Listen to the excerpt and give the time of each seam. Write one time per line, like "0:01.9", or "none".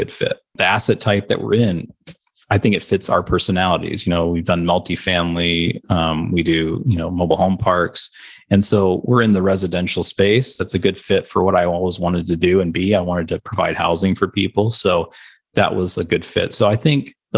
none